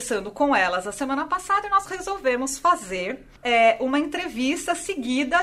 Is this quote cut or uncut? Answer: cut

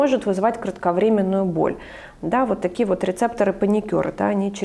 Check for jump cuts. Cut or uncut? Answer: uncut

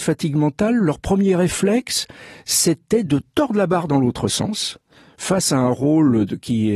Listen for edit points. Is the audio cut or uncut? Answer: uncut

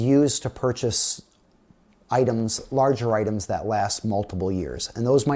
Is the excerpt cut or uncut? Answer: uncut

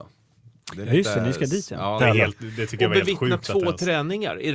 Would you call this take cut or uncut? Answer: cut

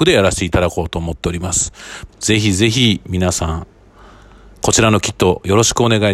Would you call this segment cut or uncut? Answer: cut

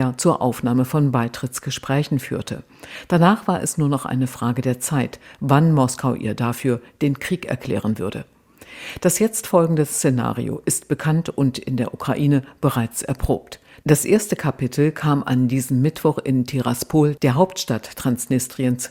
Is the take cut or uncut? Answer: uncut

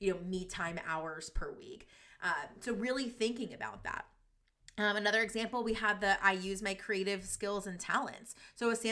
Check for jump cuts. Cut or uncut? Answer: uncut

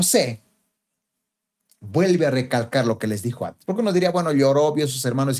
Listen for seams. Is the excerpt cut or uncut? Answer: uncut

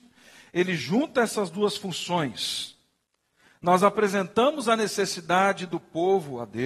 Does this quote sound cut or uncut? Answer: uncut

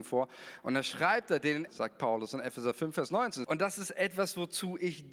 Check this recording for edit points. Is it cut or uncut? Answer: cut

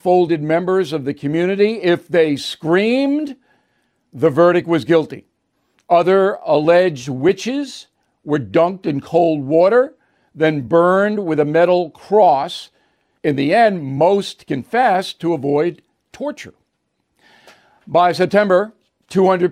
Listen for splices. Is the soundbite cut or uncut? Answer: uncut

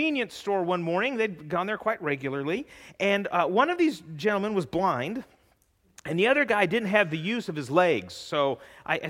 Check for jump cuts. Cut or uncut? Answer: uncut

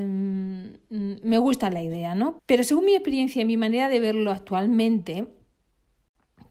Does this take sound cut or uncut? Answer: cut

